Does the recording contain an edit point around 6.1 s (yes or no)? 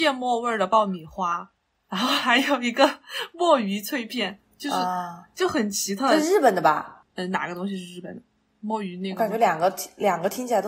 no